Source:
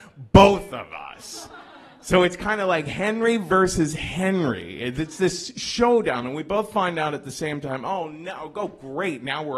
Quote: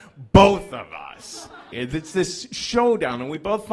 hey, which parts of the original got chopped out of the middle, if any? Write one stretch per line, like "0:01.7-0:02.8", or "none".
0:01.7-0:04.8